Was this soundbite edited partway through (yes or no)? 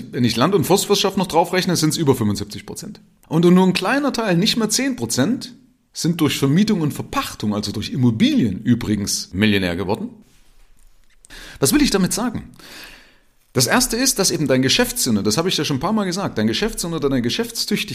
no